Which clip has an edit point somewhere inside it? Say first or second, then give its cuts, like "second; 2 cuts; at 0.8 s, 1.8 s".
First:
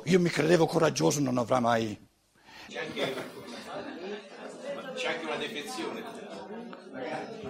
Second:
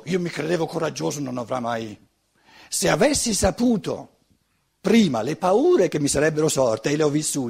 first; 1 cut; at 2.7 s